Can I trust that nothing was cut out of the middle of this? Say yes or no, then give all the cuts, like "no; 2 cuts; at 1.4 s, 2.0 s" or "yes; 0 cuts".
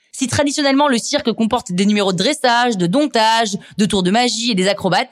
yes; 0 cuts